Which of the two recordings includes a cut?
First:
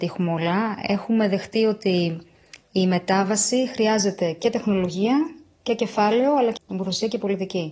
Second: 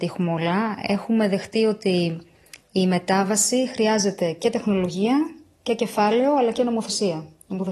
first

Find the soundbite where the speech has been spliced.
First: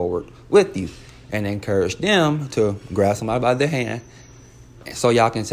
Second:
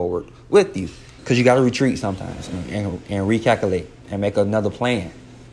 second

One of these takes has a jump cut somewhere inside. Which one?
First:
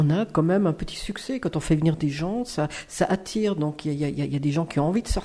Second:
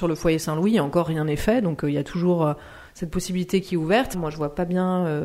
second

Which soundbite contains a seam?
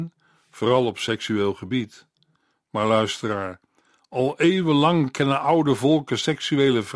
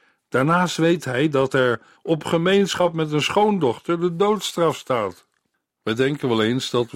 second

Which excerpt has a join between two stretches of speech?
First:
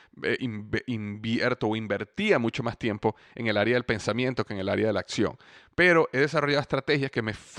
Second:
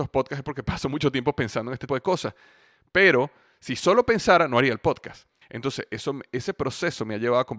second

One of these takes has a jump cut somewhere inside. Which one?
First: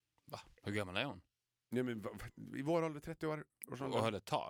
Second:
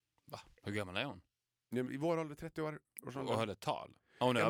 second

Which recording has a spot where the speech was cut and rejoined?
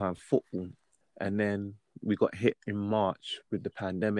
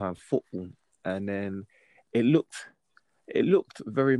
first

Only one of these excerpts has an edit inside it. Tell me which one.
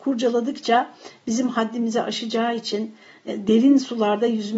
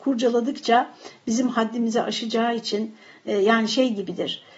first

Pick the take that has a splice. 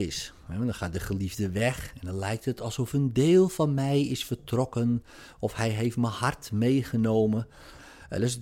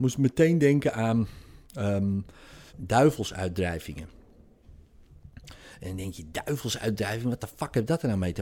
second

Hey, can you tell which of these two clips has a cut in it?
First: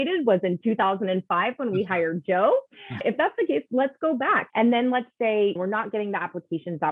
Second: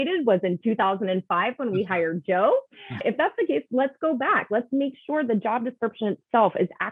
first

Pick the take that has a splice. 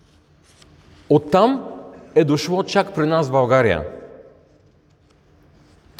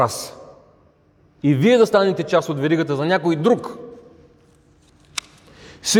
first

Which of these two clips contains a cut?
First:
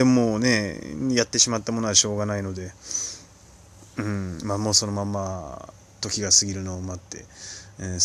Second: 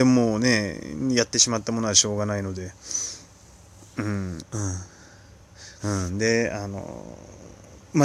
second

